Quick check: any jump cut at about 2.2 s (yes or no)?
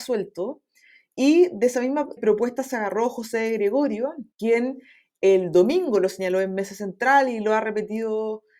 yes